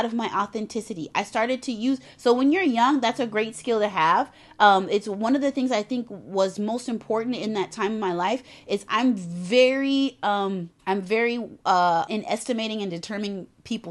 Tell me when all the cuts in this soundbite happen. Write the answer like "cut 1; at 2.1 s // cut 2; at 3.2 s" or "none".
cut 1; at 10.8 s // cut 2; at 12.1 s